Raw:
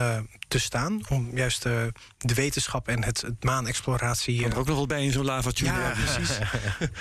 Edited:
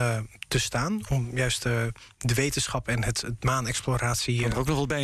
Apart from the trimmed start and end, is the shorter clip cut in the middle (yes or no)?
no